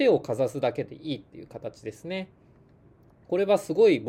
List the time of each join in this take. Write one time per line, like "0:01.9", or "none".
none